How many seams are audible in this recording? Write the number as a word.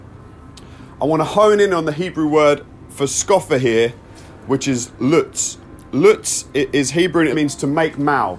one